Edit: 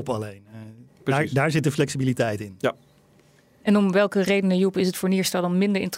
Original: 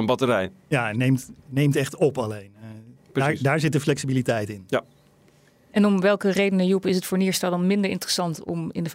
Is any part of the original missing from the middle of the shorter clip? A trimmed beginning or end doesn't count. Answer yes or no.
no